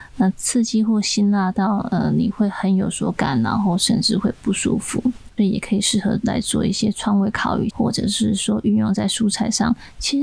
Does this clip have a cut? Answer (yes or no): yes